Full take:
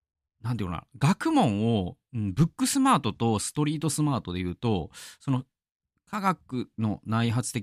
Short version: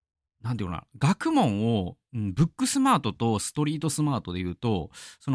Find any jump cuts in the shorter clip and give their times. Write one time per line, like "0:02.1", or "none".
none

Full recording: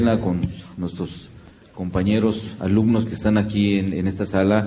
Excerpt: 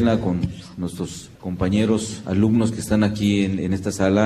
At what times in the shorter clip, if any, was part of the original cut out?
0:01.4

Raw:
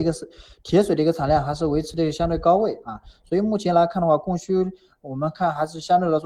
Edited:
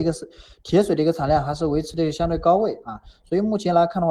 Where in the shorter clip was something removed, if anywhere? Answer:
none

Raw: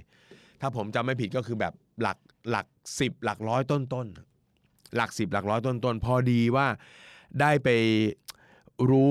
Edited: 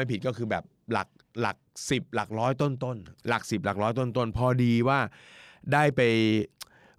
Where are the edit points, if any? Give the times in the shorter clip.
0:03.2

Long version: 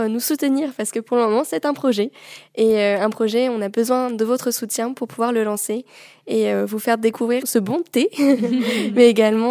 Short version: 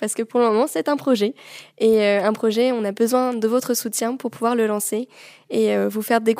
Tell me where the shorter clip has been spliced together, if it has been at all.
none

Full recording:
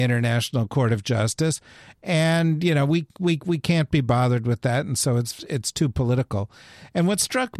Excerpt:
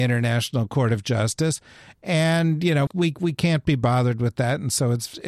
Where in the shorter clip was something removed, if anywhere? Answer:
0:02.9

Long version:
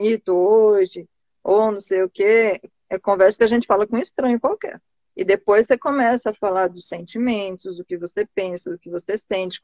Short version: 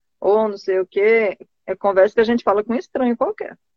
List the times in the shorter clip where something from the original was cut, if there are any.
none

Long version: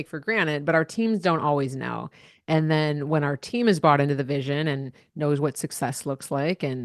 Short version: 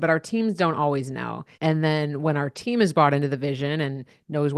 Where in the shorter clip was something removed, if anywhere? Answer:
0:01.5

